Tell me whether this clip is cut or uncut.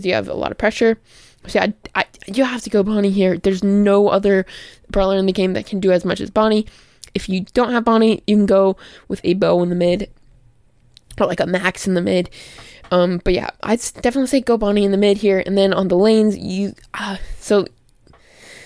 uncut